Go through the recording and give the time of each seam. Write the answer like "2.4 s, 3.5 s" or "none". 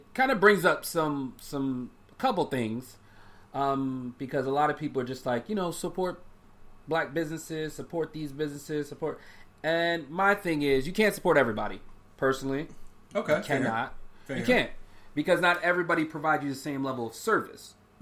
none